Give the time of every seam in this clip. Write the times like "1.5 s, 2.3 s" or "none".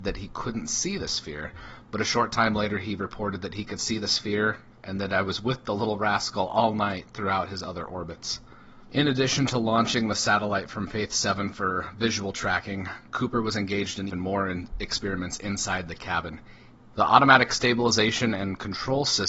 14.1 s, 16.9 s